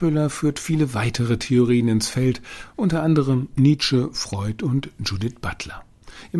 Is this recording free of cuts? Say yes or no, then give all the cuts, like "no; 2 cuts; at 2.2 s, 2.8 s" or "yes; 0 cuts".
yes; 0 cuts